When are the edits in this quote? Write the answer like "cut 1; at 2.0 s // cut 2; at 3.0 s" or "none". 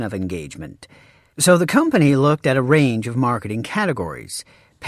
cut 1; at 1.3 s